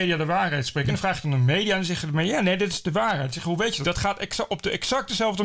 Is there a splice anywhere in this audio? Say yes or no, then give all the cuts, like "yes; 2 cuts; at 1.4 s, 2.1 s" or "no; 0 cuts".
yes; 1 cut; at 3.8 s